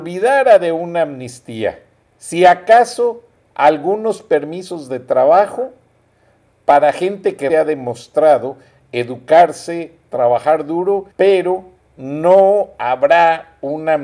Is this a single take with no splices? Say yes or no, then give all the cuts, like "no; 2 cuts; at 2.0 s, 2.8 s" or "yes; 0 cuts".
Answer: no; 2 cuts; at 7.5 s, 11.1 s